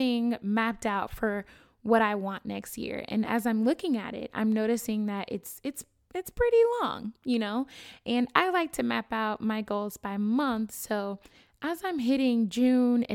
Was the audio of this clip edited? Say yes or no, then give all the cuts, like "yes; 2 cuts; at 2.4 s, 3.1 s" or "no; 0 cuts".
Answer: no; 0 cuts